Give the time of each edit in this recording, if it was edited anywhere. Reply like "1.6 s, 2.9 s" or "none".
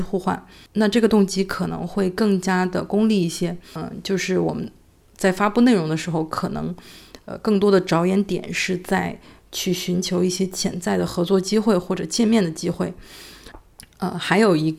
none